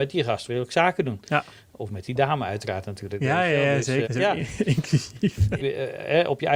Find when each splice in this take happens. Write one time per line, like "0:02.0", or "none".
0:04.0
0:05.6